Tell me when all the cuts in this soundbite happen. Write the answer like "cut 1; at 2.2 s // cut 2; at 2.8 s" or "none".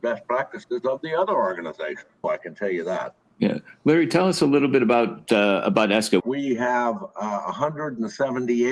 cut 1; at 2.2 s // cut 2; at 6.2 s